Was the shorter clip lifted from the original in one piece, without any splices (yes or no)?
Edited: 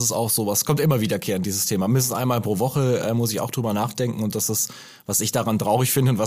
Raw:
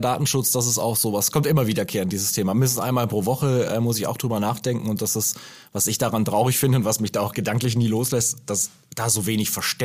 yes